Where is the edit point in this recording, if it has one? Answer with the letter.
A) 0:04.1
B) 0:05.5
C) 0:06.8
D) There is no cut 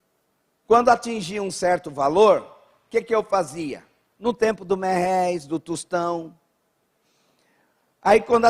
A